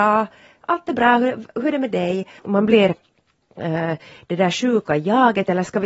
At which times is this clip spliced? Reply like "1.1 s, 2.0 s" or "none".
2.4 s